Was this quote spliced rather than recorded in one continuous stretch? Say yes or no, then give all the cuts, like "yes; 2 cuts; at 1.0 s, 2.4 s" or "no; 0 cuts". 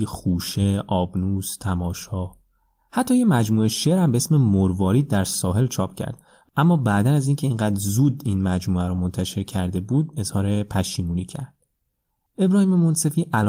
no; 0 cuts